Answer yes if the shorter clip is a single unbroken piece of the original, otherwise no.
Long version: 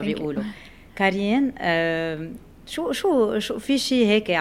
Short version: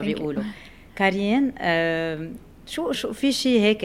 no